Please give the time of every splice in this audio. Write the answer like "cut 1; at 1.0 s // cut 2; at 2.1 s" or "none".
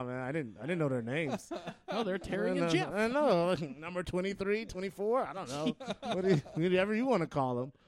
none